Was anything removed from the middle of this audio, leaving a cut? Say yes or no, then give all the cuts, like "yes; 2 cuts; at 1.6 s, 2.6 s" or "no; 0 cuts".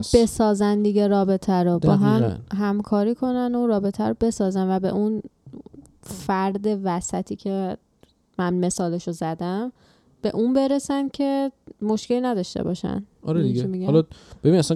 no; 0 cuts